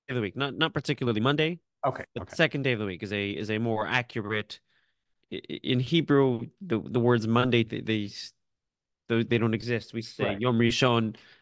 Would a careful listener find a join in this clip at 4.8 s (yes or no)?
no